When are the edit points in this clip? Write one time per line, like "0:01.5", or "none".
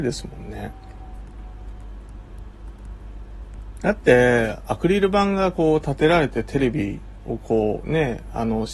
0:03.8